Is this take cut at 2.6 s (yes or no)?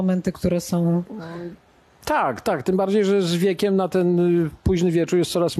no